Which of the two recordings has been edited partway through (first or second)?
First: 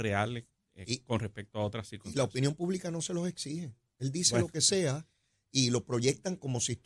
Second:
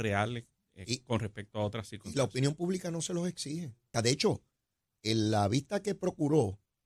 second